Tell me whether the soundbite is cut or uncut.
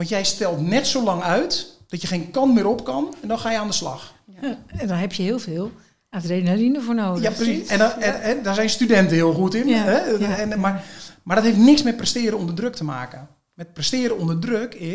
uncut